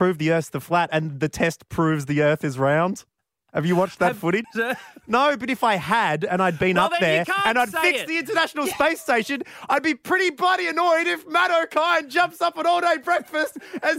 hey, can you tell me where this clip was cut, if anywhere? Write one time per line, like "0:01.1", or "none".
0:04.4